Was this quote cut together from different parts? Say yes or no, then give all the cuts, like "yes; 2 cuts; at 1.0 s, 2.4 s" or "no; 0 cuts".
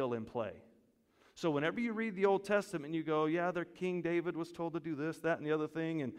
no; 0 cuts